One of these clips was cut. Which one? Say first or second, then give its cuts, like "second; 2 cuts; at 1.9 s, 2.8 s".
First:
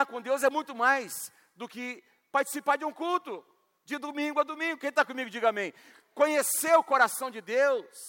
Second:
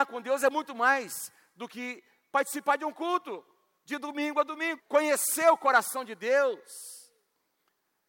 second; 1 cut; at 4.8 s